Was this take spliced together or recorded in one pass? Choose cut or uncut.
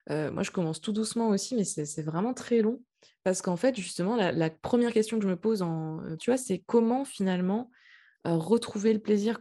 cut